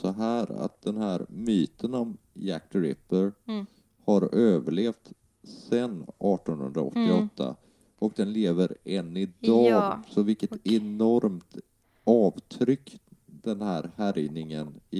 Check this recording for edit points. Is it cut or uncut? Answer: uncut